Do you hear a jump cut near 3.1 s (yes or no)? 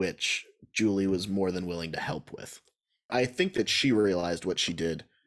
yes